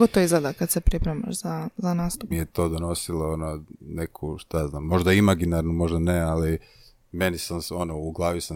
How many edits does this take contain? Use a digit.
1